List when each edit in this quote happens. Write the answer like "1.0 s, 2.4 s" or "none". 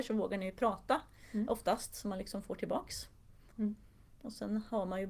3.5 s